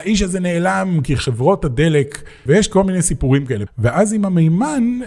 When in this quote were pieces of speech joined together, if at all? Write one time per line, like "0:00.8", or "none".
0:02.5
0:03.7